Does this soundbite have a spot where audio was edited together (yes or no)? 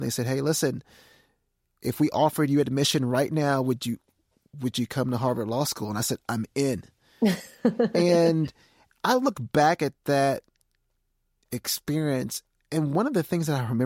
no